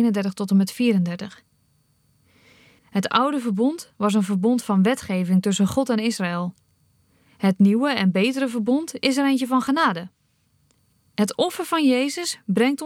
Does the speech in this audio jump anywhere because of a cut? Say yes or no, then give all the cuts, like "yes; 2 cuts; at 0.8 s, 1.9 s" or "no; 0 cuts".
yes; 1 cut; at 2.8 s